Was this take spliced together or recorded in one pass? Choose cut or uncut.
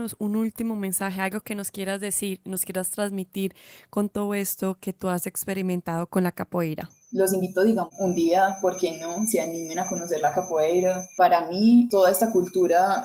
uncut